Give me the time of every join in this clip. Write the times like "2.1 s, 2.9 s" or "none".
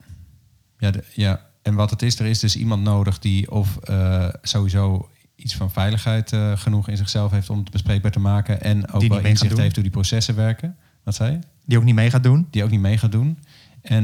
none

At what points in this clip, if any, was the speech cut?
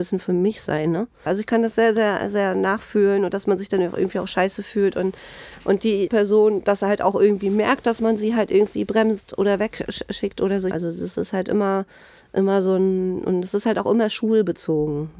1.3 s, 6.1 s, 10.7 s

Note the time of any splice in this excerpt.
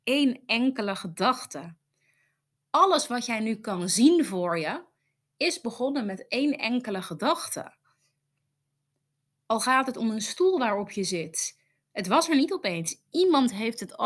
none

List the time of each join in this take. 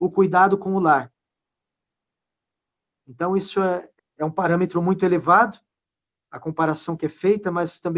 4.0 s

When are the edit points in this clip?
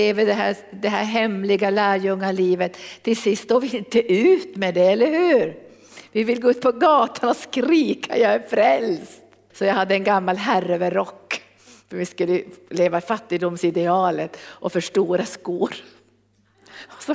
9.5 s

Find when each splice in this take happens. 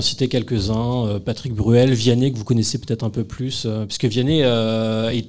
none

